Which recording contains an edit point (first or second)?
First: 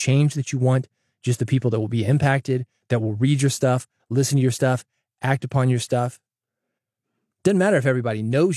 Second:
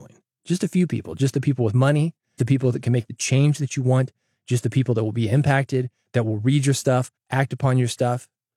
second